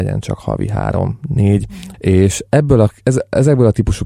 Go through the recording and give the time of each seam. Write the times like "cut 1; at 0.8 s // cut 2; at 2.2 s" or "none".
cut 1; at 1.9 s